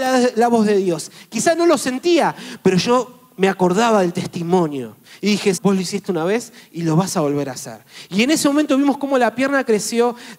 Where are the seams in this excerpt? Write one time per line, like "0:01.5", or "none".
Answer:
0:05.6